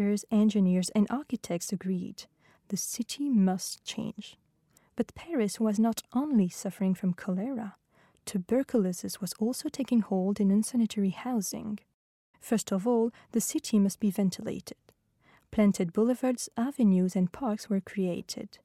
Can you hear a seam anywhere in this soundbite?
yes; 2 cuts; at 4.8 s, 12.3 s

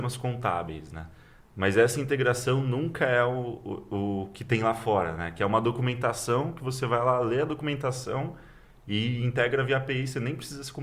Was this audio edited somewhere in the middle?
no; 0 cuts

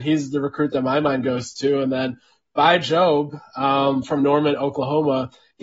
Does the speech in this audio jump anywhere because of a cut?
no; 0 cuts

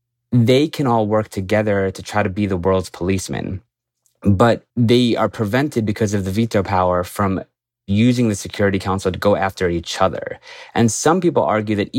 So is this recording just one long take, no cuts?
no; 1 cut; at 4.7 s

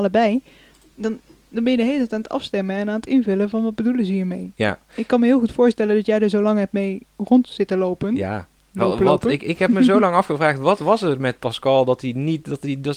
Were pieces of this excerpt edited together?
no; 0 cuts

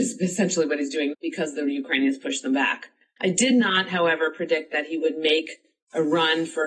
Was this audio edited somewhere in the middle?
yes; 2 cuts; at 1.1 s, 3.2 s

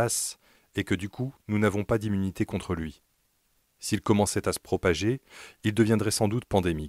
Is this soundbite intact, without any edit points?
yes; 0 cuts

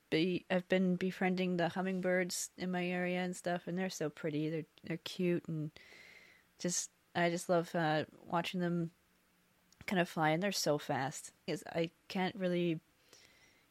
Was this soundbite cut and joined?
yes; 1 cut; at 11.5 s

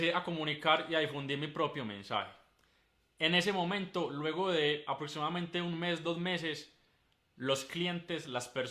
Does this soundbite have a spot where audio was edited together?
no; 0 cuts

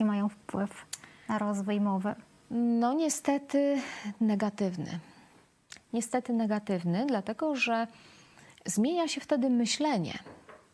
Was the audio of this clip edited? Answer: no; 0 cuts

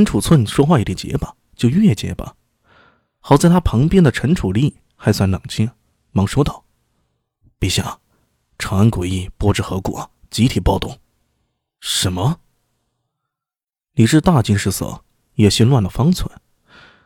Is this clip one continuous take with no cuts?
no; 1 cut; at 1.5 s

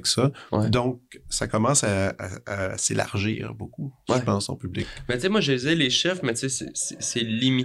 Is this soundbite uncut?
yes; 0 cuts

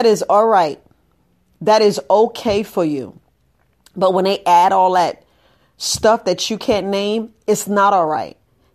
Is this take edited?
no; 0 cuts

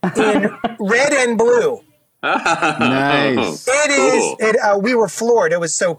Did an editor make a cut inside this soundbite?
yes; 1 cut; at 4.4 s

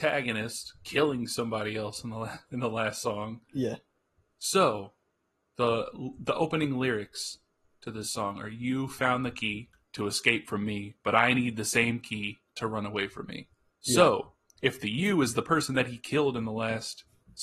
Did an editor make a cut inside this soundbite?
no; 0 cuts

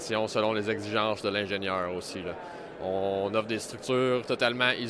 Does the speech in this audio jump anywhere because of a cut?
no; 0 cuts

